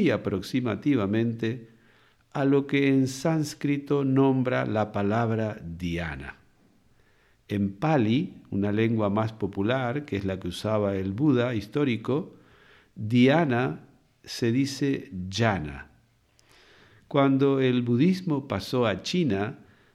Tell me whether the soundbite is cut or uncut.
uncut